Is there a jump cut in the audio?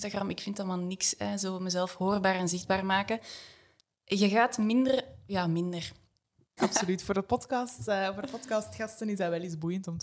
yes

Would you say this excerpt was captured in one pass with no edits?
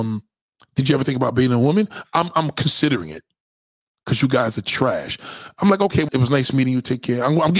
no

